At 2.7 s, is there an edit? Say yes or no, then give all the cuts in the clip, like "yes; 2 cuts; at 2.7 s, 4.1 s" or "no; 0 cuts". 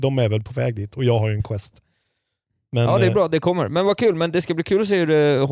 no; 0 cuts